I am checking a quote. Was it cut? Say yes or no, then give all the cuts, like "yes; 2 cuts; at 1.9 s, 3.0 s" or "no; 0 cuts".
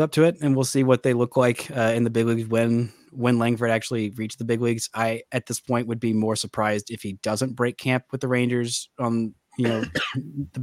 no; 0 cuts